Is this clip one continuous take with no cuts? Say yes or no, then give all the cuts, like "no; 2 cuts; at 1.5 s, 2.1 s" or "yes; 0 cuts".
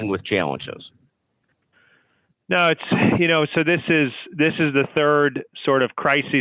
yes; 0 cuts